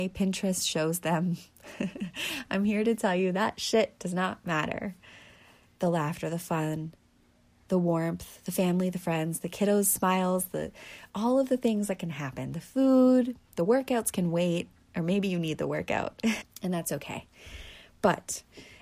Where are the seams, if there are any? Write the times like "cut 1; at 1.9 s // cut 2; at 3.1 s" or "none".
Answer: cut 1; at 5.7 s // cut 2; at 16.4 s